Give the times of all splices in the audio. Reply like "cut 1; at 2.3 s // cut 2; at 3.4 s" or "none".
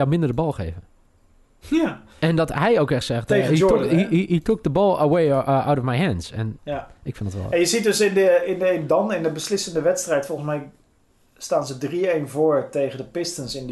cut 1; at 6.6 s

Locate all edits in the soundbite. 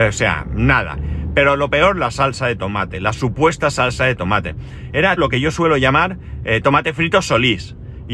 cut 1; at 5.2 s

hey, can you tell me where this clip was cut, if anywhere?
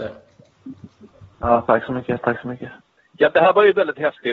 none

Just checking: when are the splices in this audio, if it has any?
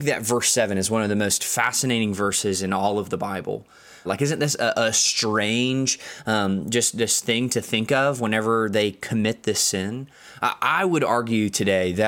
cut 1; at 4.1 s

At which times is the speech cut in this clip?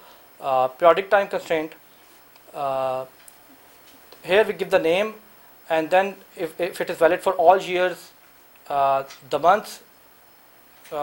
none

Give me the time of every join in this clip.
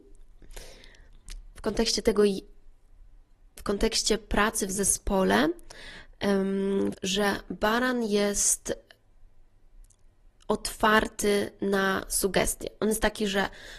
cut 1; at 6.9 s

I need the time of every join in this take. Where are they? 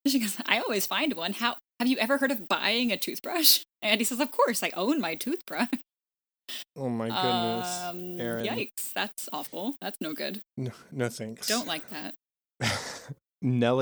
none

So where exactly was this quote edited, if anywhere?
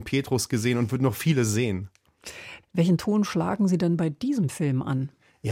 cut 1; at 2.6 s

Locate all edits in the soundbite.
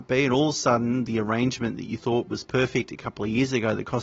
none

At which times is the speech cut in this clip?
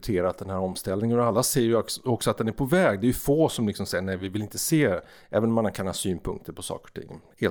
none

